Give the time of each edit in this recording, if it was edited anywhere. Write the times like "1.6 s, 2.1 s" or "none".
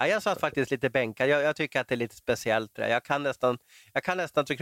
none